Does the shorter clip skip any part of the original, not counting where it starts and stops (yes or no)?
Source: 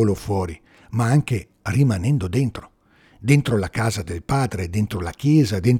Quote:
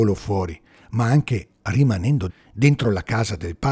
yes